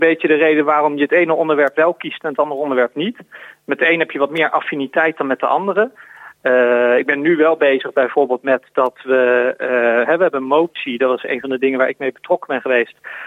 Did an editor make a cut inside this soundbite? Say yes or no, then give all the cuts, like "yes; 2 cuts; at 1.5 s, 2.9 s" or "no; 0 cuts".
no; 0 cuts